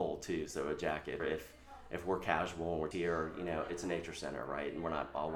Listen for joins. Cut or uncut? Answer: cut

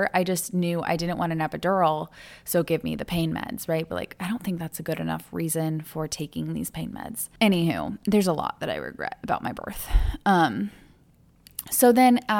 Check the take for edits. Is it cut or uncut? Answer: cut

